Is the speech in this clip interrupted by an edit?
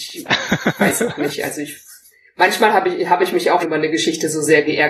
yes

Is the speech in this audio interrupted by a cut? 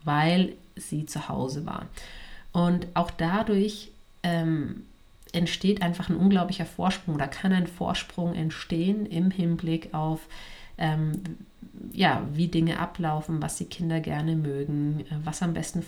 no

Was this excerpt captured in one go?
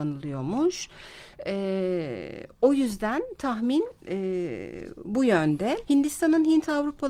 no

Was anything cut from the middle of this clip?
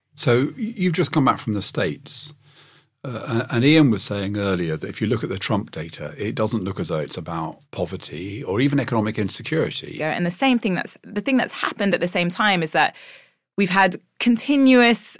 yes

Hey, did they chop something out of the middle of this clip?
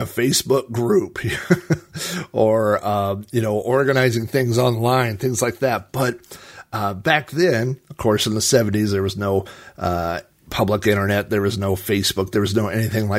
no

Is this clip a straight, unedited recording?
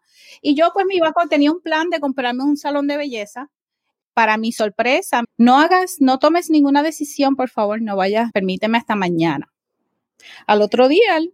no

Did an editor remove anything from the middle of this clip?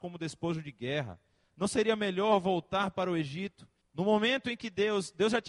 yes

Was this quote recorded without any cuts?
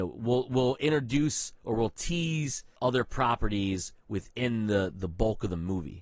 no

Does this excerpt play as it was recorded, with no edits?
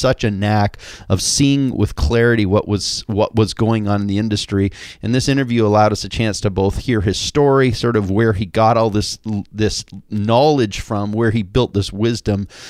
yes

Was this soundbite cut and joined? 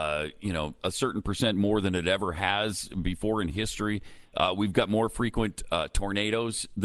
no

